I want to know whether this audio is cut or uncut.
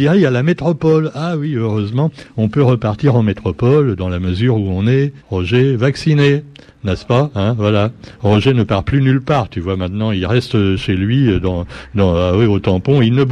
cut